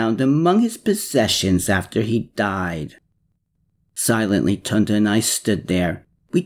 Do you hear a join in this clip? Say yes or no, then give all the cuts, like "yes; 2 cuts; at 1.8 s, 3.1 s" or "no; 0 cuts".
no; 0 cuts